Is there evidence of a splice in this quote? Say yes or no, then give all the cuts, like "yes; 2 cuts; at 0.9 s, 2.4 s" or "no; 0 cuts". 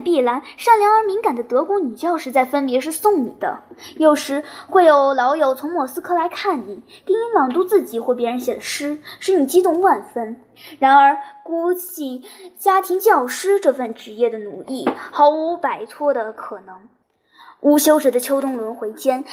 no; 0 cuts